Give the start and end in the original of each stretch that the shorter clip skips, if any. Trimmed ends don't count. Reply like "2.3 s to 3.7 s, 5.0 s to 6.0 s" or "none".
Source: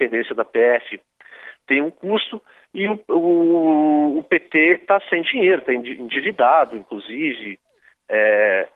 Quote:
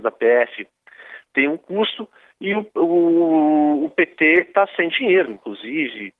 5.6 s to 6.7 s